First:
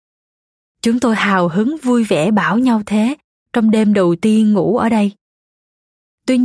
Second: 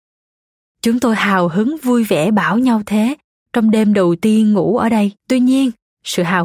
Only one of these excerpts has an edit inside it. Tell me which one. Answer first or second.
second